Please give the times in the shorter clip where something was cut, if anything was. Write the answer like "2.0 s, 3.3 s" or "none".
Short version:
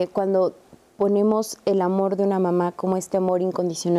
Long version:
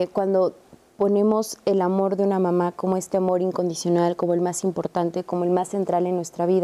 none